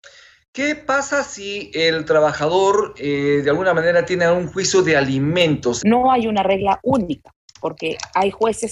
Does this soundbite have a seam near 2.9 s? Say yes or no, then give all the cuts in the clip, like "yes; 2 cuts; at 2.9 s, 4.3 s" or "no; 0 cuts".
no; 1 cut; at 5.8 s